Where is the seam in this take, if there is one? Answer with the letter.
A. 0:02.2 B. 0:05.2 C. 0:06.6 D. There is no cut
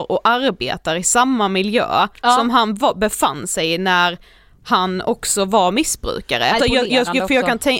C